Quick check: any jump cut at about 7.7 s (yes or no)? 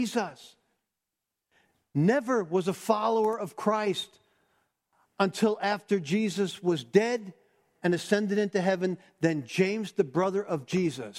yes